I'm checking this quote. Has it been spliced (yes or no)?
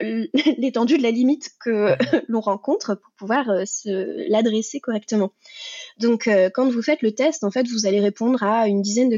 no